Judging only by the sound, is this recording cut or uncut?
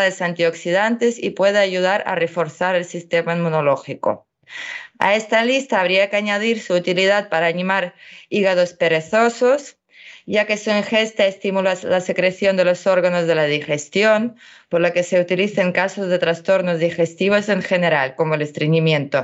uncut